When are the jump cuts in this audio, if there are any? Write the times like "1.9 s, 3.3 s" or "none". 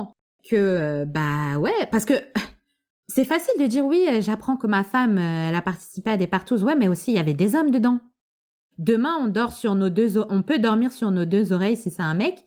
8.7 s